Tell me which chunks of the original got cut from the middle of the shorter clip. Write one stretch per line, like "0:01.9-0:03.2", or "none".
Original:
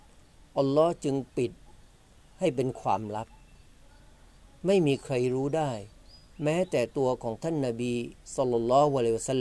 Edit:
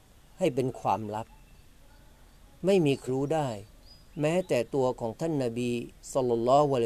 0:05.1-0:05.3